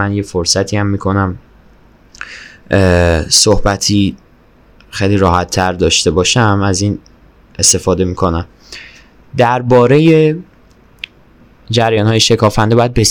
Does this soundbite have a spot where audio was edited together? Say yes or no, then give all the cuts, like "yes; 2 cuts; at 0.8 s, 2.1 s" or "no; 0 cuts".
no; 0 cuts